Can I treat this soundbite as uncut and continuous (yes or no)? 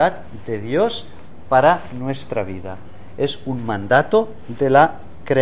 yes